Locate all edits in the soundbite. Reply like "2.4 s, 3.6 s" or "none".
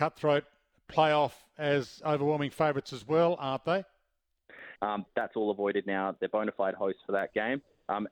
4.8 s